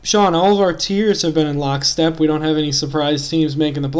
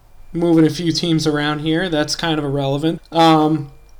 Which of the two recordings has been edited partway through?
second; 1 cut; at 3.0 s

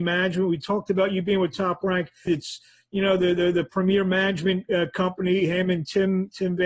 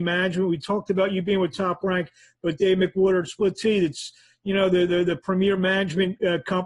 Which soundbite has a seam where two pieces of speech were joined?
first; 1 cut; at 2.3 s

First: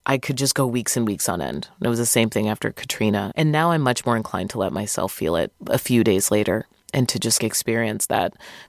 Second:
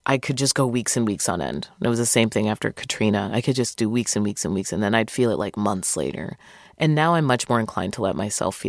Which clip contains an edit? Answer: first; 3 cuts; at 3.3 s, 5.6 s, 7.4 s

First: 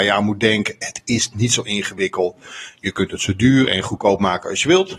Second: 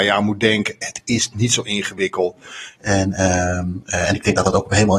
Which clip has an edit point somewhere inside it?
second; 1 cut; at 2.8 s

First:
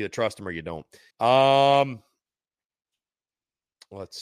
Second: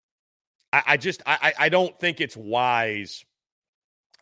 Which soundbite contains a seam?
first; 1 cut; at 1.1 s

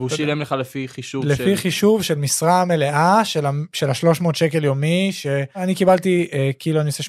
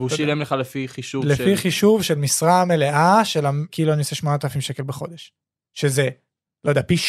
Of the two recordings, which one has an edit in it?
second; 1 cut; at 3.7 s

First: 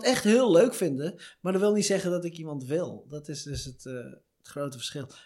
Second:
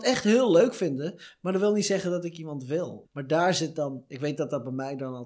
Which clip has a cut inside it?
second; 1 cut; at 3.0 s

